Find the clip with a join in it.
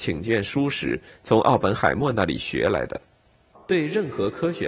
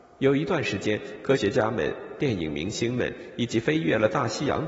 first; 1 cut; at 3.5 s

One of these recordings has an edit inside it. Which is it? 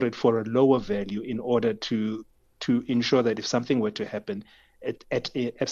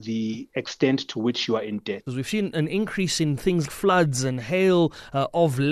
second; 2 cuts; at 2.1 s, 3.7 s

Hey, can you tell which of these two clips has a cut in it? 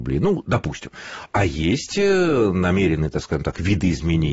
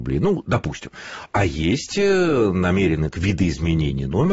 second; 1 cut; at 3.1 s

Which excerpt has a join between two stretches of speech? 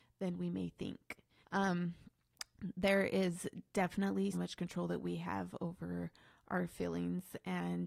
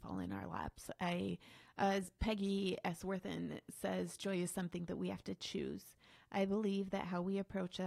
first; 2 cuts; at 1.4 s, 4.3 s

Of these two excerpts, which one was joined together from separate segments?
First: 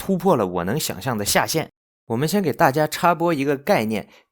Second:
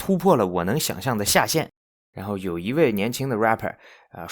second; 1 cut; at 2.0 s

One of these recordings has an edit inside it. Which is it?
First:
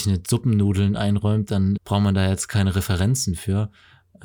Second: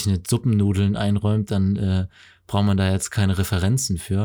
first; 1 cut; at 1.8 s

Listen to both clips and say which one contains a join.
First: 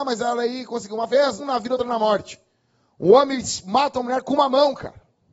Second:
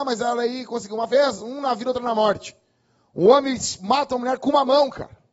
first; 1 cut; at 1.4 s

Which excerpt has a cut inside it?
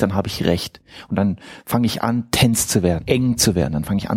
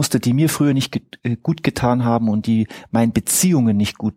first; 1 cut; at 3.0 s

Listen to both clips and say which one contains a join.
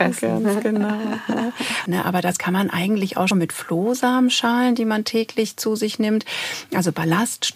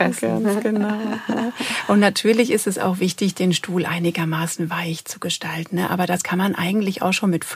first; 2 cuts; at 1.9 s, 3.3 s

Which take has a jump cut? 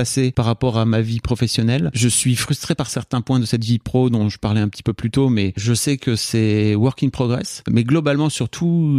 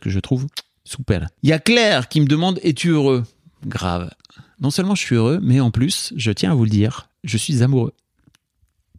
second; 1 cut; at 7.2 s

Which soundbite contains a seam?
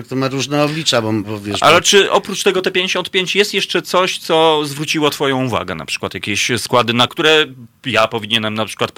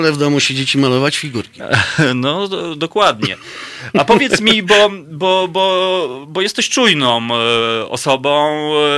first; 1 cut; at 7.1 s

